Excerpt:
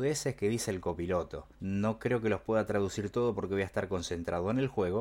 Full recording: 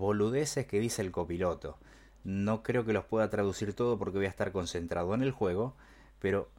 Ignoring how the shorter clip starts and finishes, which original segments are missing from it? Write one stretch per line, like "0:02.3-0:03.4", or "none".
0:01.8-0:02.2